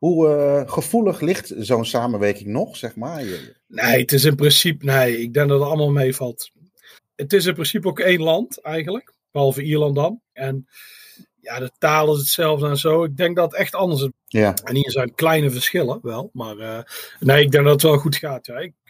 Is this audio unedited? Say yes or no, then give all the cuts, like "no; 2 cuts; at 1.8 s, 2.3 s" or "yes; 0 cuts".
no; 3 cuts; at 7.0 s, 10.4 s, 14.1 s